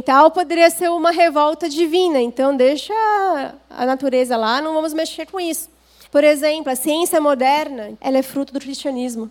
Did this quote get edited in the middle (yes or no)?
yes